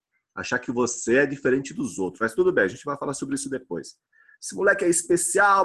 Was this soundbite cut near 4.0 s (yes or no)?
no